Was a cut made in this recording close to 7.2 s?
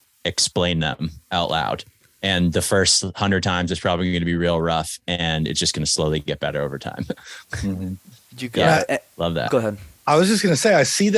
no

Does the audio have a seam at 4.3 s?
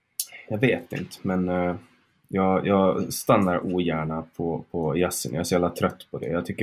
no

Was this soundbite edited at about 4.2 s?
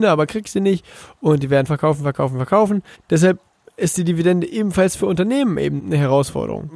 no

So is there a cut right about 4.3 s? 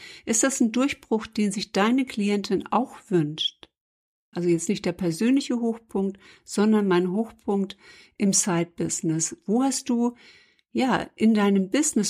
yes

